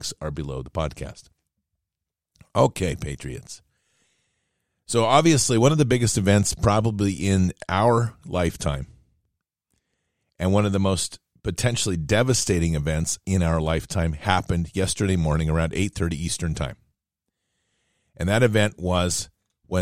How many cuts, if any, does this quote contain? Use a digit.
0